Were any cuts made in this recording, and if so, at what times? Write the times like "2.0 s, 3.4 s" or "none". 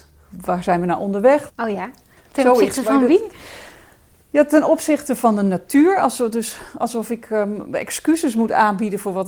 1.5 s